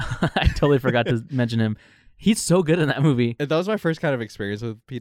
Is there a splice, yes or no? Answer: no